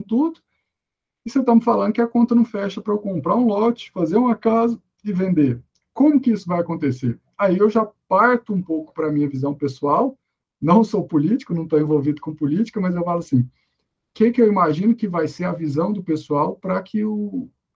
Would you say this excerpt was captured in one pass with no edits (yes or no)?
yes